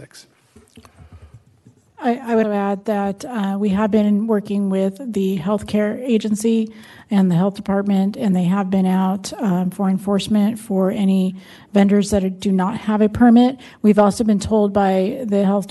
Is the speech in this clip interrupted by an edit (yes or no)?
yes